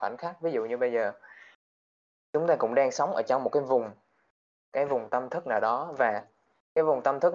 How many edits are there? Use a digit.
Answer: 0